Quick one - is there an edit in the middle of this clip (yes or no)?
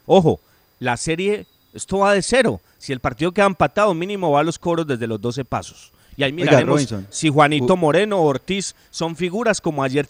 no